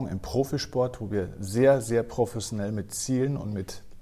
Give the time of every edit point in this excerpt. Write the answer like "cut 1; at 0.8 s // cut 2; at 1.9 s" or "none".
none